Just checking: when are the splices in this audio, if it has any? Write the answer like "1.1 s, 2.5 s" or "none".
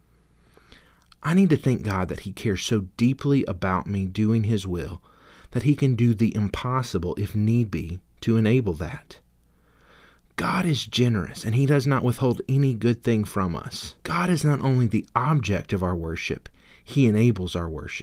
14.0 s